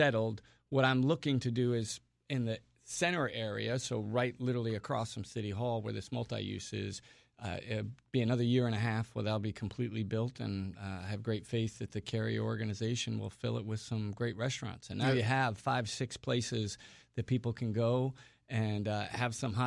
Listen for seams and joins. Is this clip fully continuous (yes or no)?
yes